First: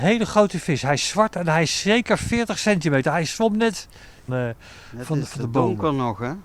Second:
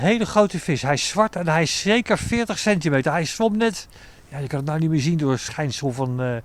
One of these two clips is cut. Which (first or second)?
first